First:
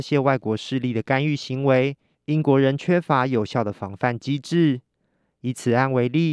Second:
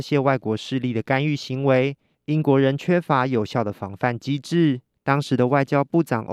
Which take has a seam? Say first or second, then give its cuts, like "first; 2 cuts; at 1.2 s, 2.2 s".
second; 1 cut; at 4.9 s